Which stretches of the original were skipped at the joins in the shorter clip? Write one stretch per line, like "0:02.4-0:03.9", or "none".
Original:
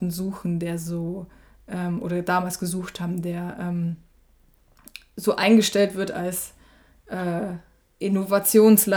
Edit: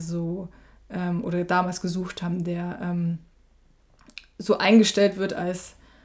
none

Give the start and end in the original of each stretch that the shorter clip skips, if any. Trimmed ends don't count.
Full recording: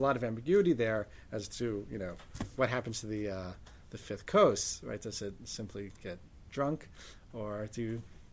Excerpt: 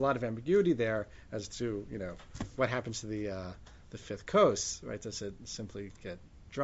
none

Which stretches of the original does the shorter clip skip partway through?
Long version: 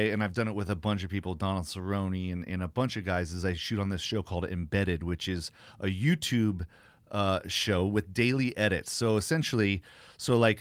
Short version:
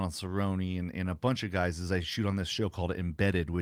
none

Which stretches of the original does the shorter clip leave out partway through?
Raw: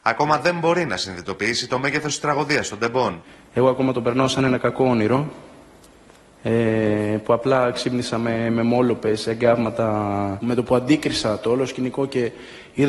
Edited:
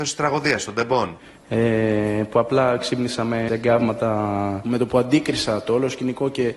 0:03.4-0:06.3
0:08.4-0:09.2

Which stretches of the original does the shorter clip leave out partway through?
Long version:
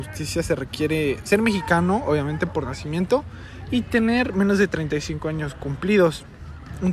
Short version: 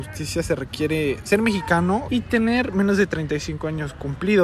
0:02.0-0:03.7

